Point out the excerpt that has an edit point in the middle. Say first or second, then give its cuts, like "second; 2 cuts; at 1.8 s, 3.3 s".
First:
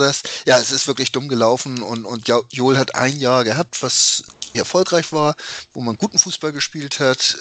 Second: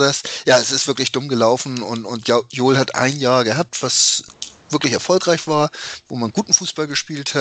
first; 1 cut; at 4.5 s